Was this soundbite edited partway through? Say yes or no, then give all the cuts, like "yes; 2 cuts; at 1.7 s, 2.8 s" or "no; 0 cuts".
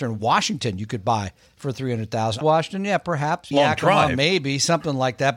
yes; 2 cuts; at 2.4 s, 3.5 s